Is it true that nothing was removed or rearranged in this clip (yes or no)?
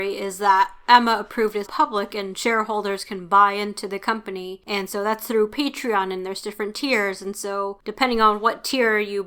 no